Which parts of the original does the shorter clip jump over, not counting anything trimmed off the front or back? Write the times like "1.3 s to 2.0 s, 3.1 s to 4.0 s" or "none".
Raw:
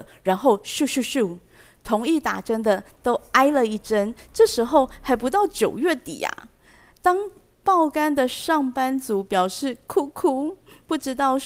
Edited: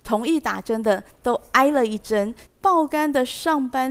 4.3 s to 7.5 s